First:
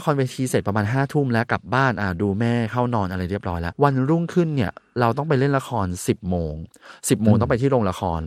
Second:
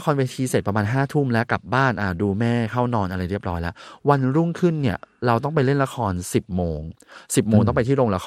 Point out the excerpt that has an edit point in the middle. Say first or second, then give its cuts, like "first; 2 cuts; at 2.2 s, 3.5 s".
first; 1 cut; at 3.7 s